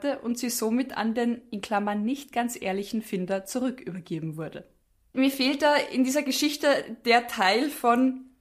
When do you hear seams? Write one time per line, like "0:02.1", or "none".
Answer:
none